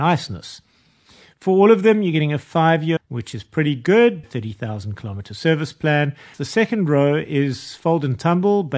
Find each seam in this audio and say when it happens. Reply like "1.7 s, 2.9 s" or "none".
3.0 s, 4.2 s, 6.3 s